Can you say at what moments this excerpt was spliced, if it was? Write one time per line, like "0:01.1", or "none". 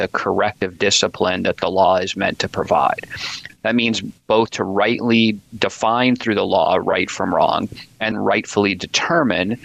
0:03.5
0:08.1